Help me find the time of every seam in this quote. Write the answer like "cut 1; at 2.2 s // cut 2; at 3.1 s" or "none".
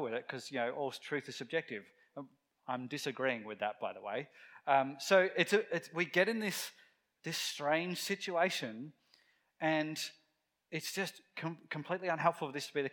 none

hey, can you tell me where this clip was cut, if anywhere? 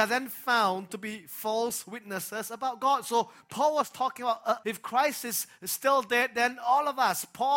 cut 1; at 4.6 s

